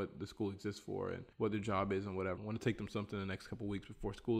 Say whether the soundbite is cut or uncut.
cut